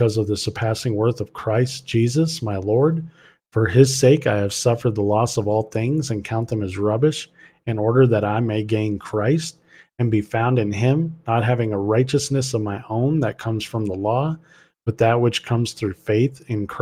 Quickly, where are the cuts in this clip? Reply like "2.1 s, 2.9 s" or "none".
none